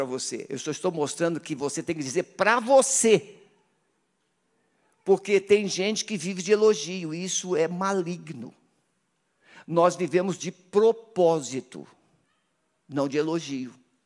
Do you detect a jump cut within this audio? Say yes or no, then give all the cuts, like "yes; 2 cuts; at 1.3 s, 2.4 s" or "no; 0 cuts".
no; 0 cuts